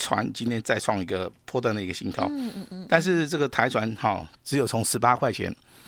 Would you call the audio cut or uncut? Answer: uncut